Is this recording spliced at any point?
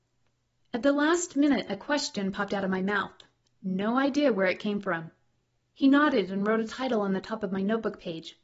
yes; 1 cut; at 5.5 s

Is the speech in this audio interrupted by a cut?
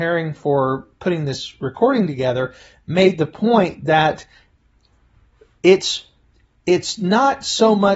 no; 0 cuts

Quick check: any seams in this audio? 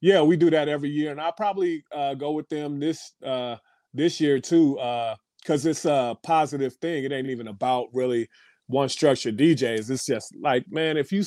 no; 0 cuts

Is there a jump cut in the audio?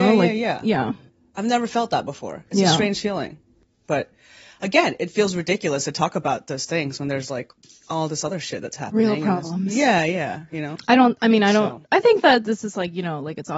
no; 0 cuts

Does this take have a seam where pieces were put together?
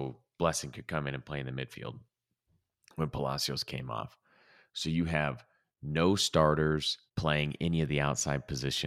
yes; 1 cut; at 7.1 s

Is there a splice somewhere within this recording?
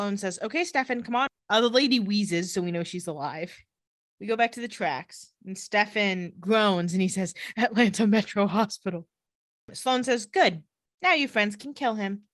yes; 1 cut; at 1.3 s

